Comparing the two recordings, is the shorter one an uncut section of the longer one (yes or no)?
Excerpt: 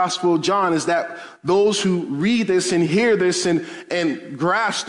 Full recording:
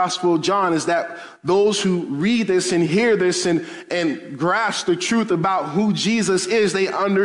yes